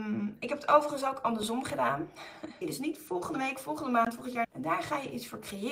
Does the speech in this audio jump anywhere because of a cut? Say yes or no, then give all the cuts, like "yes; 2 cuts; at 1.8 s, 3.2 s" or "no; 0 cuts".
yes; 2 cuts; at 2.6 s, 4.4 s